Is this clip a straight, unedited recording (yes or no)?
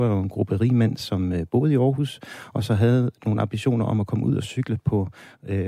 yes